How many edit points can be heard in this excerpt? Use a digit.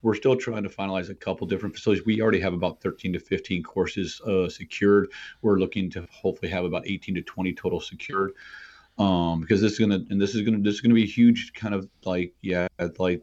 0